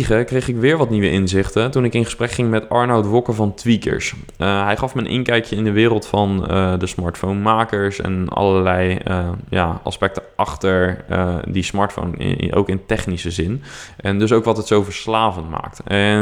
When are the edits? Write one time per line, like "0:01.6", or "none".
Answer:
none

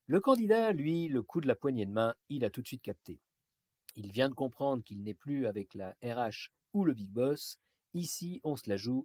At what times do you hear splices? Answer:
none

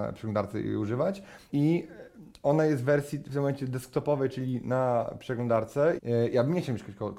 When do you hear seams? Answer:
0:01.5
0:06.0

